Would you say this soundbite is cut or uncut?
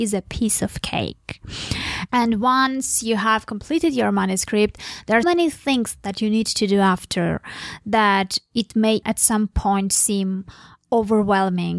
cut